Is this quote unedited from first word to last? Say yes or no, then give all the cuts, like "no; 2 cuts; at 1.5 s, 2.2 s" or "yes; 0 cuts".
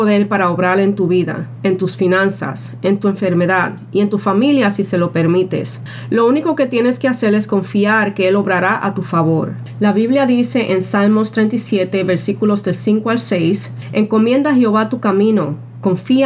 yes; 0 cuts